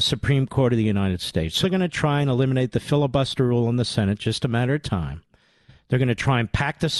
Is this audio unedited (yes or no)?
no